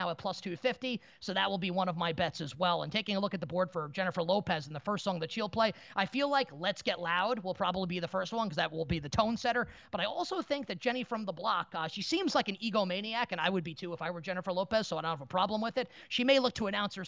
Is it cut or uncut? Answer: uncut